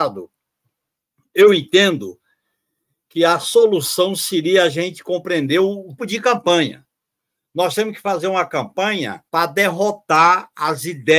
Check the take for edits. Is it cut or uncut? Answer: cut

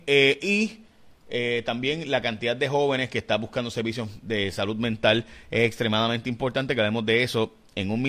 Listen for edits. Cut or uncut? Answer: uncut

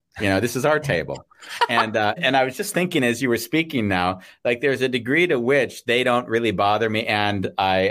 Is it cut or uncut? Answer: cut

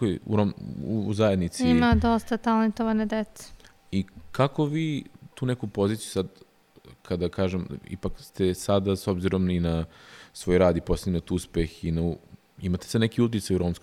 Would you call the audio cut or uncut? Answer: uncut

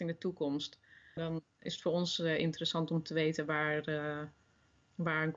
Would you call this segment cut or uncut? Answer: cut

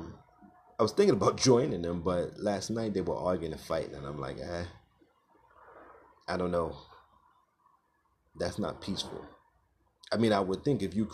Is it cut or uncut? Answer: uncut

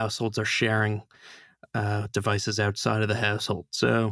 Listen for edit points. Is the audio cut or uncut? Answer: uncut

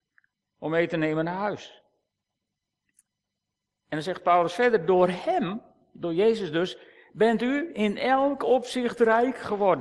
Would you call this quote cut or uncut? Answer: uncut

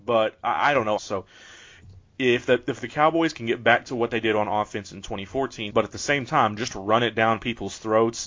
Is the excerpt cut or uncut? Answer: cut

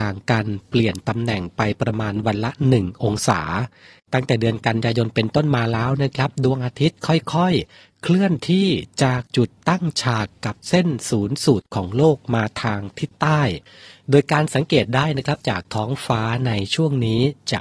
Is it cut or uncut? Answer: uncut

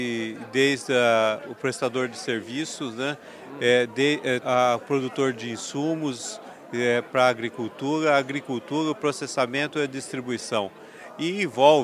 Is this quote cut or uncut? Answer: cut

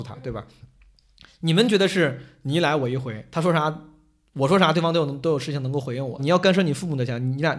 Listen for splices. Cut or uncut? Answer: cut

